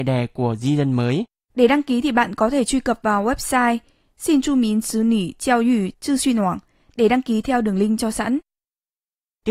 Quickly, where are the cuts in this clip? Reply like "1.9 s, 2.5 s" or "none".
1.5 s